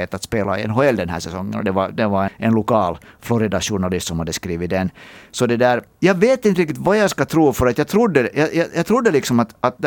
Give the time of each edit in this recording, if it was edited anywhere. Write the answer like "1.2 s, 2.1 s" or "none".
2.3 s